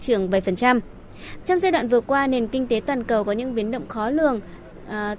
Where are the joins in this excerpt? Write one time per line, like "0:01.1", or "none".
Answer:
0:01.4